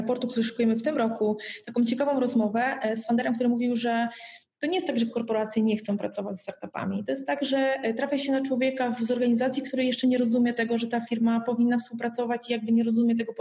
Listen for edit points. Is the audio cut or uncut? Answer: uncut